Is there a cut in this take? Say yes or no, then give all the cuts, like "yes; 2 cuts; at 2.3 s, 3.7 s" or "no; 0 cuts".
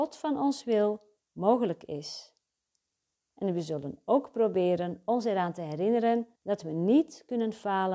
yes; 2 cuts; at 3.2 s, 6.4 s